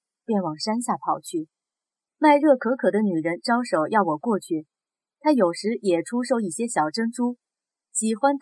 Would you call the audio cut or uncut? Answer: cut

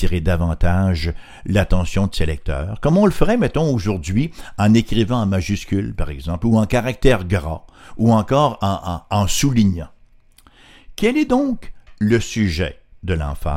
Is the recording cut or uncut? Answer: uncut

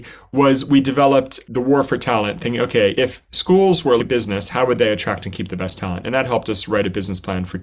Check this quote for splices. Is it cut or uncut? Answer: cut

